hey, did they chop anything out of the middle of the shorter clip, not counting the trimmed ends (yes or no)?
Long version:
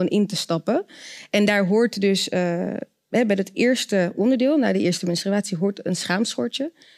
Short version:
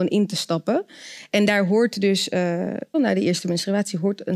yes